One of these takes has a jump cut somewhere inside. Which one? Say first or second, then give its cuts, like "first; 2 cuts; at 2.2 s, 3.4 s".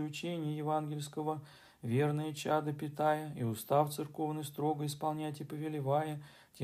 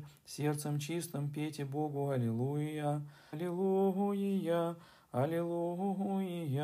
second; 1 cut; at 3.3 s